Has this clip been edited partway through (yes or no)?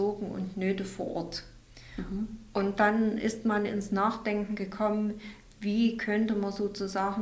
no